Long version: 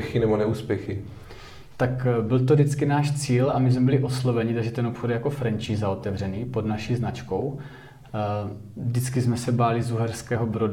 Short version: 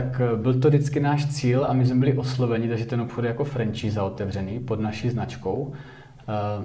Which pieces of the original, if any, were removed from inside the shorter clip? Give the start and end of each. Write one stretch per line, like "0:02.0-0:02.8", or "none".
none